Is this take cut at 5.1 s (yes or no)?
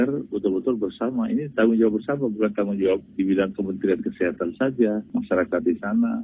yes